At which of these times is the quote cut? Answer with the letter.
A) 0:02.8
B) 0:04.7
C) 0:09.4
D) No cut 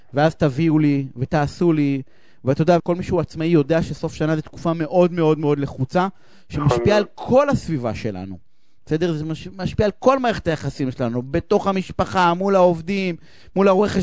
A